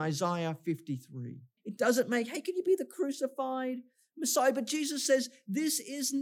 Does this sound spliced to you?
yes; 1 cut; at 1.6 s

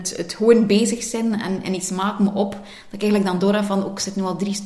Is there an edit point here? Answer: no; 0 cuts

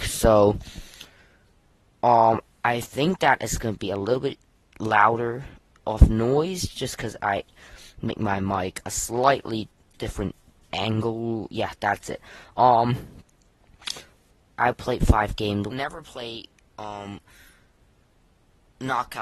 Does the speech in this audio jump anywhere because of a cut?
yes; 2 cuts; at 14.6 s, 15.7 s

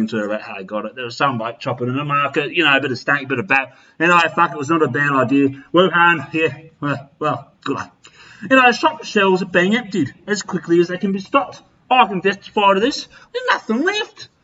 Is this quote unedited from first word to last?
no; 2 cuts; at 7.6 s, 13.3 s

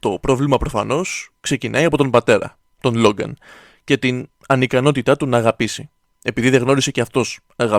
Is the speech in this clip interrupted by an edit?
no; 0 cuts

